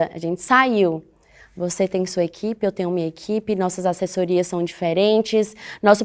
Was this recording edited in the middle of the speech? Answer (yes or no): no